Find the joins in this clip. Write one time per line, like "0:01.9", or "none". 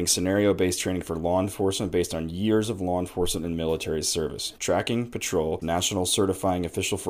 0:04.6
0:05.6